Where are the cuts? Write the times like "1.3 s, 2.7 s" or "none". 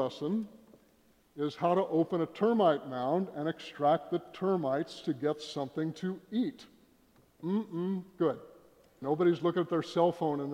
9.0 s